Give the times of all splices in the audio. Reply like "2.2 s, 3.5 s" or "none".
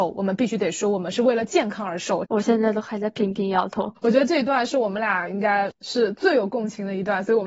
2.2 s, 4.0 s